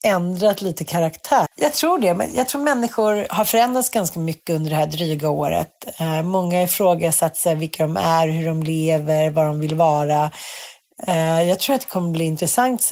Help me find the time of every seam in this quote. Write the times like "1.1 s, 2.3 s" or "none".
1.5 s